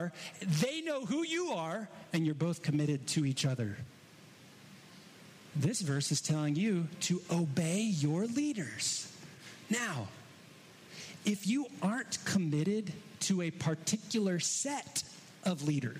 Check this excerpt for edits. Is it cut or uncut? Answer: cut